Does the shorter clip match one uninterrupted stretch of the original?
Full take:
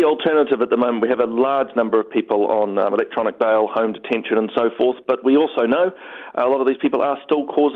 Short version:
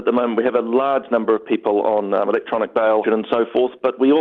no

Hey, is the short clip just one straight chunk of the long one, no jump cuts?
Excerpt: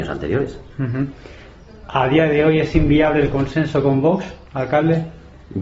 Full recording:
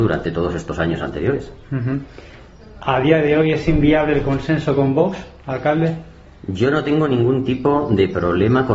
yes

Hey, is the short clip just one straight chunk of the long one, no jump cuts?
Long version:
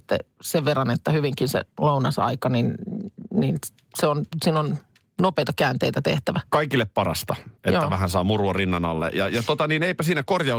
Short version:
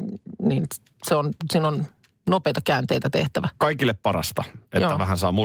yes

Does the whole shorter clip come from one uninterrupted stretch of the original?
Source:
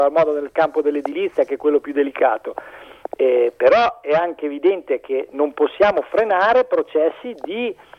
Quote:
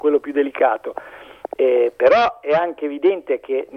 yes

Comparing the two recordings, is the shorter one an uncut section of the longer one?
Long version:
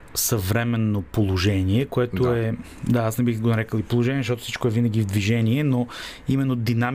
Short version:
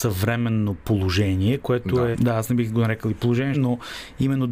no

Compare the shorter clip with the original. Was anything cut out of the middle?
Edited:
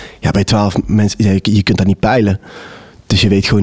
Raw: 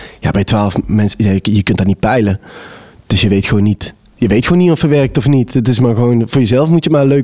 no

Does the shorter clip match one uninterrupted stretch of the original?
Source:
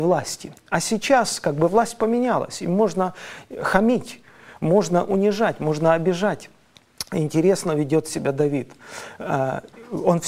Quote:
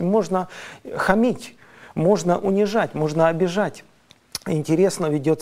yes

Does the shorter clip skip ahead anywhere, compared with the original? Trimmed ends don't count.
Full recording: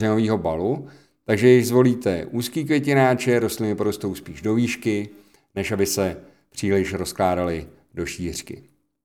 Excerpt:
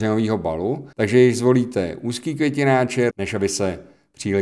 yes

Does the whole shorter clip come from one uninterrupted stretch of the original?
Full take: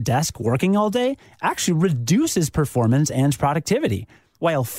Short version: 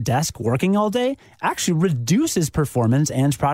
yes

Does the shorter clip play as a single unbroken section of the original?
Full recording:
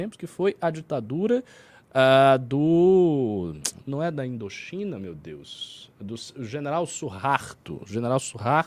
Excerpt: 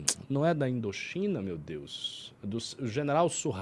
yes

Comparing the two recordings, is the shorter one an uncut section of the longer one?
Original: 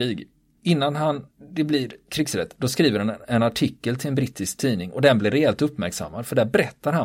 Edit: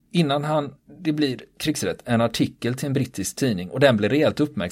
no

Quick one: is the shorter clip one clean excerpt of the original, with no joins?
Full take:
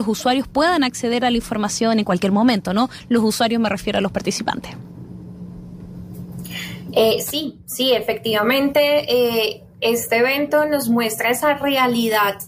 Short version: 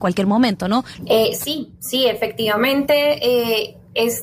no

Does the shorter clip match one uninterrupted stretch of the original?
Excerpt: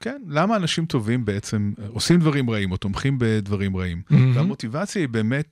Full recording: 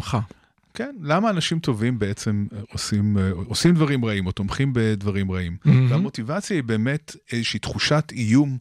no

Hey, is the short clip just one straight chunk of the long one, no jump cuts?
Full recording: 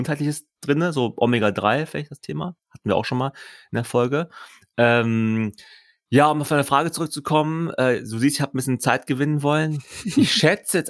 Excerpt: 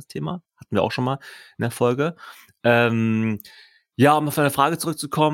yes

